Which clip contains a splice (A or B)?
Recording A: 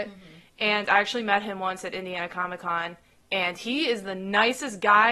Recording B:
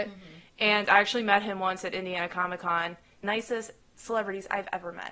B